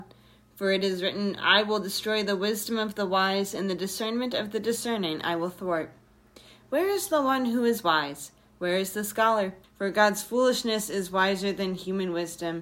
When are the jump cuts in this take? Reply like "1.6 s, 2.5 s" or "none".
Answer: 9.6 s